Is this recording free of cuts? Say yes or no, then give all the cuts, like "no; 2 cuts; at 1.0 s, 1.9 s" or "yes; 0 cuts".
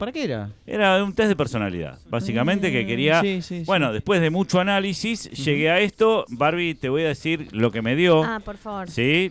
yes; 0 cuts